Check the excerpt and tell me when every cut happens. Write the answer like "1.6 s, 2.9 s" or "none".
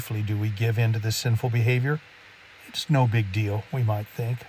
none